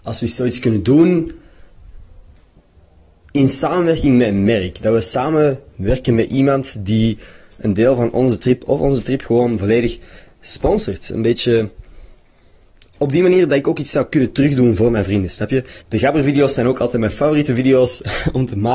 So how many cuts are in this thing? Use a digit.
1